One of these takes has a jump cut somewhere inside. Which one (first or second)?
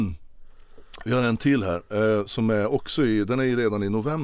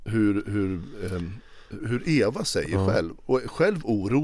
second